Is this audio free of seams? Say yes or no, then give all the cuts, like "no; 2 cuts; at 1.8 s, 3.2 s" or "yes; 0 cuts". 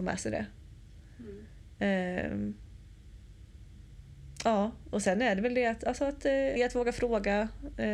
no; 1 cut; at 6.6 s